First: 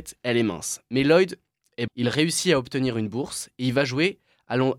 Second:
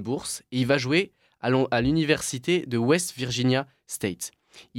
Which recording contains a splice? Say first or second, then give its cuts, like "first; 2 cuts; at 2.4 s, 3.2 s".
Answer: first; 1 cut; at 1.9 s